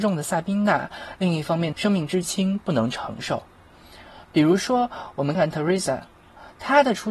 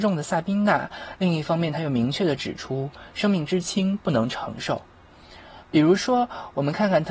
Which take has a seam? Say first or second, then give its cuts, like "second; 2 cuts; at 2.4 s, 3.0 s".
first; 2 cuts; at 1.7 s, 5.3 s